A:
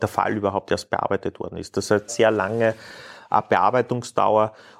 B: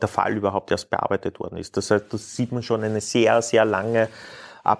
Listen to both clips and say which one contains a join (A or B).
A